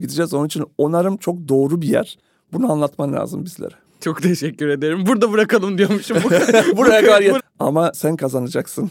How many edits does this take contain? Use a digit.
1